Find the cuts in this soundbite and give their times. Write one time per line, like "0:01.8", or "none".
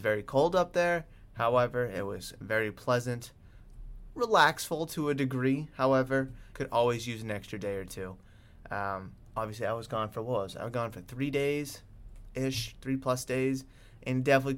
0:06.5

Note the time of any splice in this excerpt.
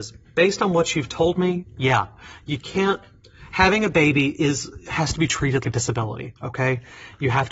0:05.6

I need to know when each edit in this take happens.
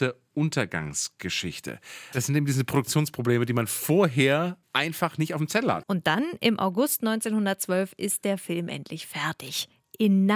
0:02.1
0:05.8

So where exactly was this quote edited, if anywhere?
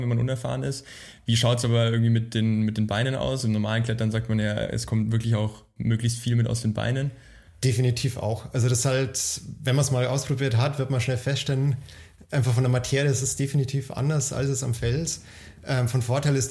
none

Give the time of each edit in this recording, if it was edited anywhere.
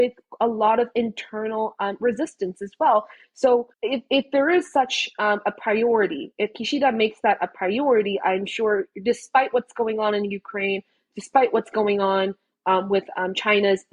0:03.7

